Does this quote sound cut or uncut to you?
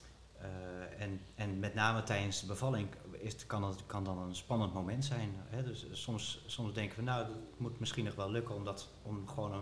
uncut